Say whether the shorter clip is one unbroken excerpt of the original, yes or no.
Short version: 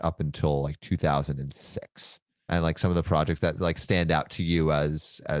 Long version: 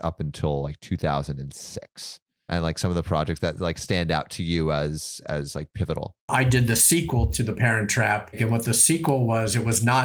yes